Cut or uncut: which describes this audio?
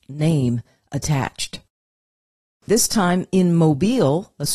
cut